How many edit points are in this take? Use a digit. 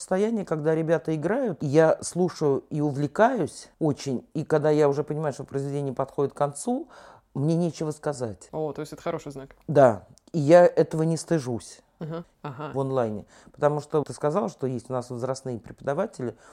2